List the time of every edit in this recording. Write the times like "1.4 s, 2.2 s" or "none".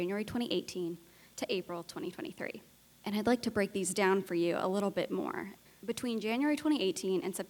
none